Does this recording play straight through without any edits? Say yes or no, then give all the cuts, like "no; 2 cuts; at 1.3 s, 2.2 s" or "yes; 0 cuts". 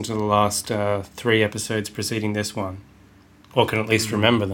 yes; 0 cuts